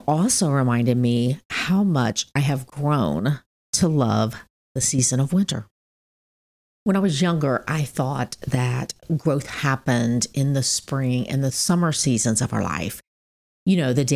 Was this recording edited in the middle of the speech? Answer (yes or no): no